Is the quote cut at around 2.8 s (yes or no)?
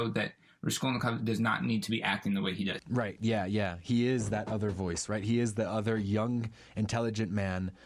yes